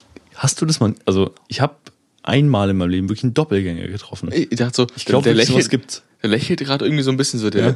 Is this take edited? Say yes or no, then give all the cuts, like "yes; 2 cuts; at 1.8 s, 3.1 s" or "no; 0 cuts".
no; 0 cuts